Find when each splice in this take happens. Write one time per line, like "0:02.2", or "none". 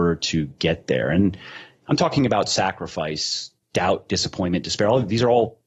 0:03.6